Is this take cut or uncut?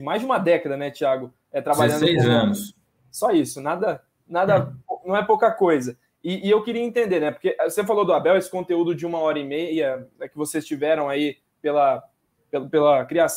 uncut